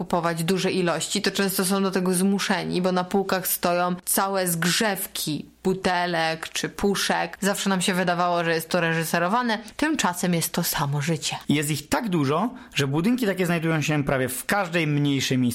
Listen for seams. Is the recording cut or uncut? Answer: cut